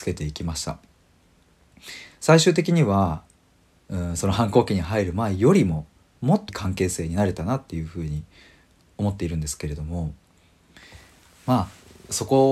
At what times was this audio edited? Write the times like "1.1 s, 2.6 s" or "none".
6.5 s